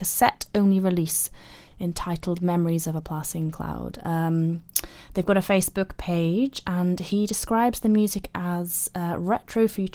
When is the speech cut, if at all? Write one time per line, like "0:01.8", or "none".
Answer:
none